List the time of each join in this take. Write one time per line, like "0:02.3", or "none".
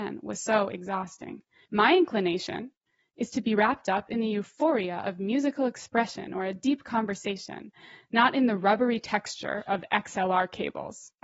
0:01.6